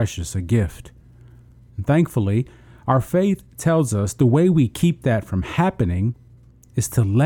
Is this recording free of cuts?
yes; 0 cuts

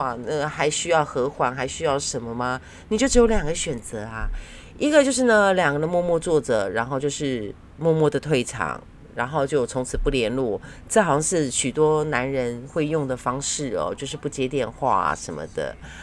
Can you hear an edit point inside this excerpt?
no; 0 cuts

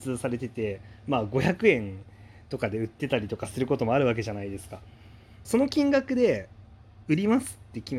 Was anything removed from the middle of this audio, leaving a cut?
yes; 1 cut; at 5.4 s

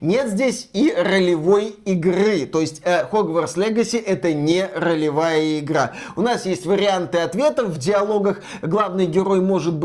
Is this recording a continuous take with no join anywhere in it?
yes; 0 cuts

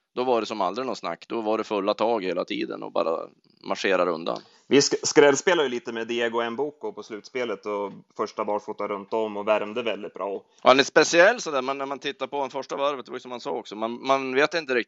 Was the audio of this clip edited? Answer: yes; 1 cut; at 10.6 s

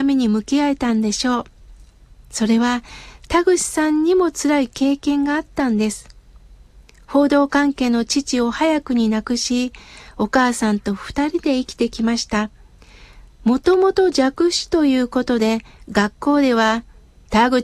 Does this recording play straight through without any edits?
yes; 0 cuts

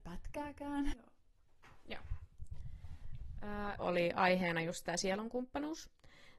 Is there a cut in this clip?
yes; 2 cuts; at 0.9 s, 3.8 s

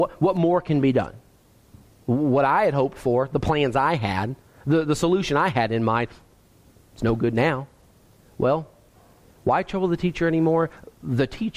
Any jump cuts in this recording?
yes; 1 cut; at 8.2 s

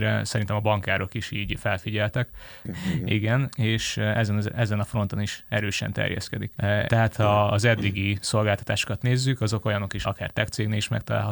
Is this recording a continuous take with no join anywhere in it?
no; 3 cuts; at 2.6 s, 6.9 s, 10.0 s

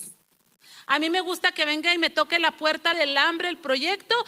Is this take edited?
yes; 1 cut; at 2.9 s

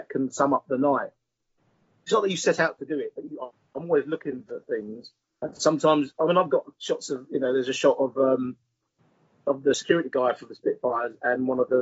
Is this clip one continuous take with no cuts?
yes; 0 cuts

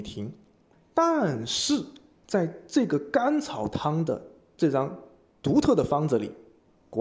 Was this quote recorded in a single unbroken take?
yes; 0 cuts

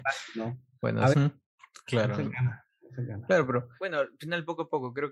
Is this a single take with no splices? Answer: no; 1 cut; at 1.1 s

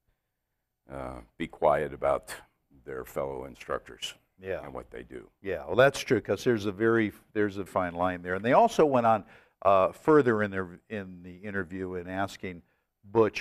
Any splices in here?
yes; 1 cut; at 7.7 s

